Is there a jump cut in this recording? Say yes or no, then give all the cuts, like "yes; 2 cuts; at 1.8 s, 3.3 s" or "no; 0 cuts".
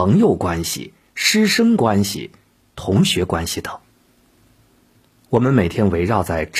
no; 0 cuts